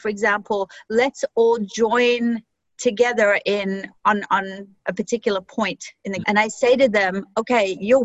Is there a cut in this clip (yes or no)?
yes